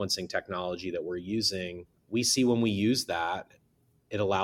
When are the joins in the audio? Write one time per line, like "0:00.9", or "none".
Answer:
0:02.0